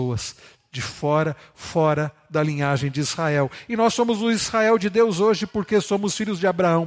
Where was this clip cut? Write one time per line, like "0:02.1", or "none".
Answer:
none